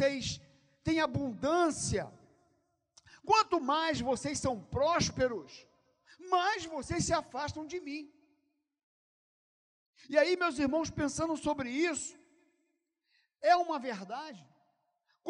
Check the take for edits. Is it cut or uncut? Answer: uncut